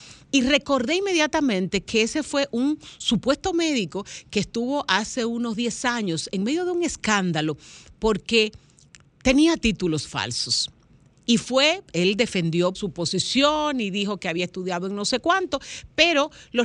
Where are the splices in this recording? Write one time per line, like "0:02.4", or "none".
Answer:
0:12.7